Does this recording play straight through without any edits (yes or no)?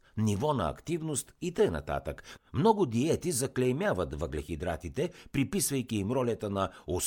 no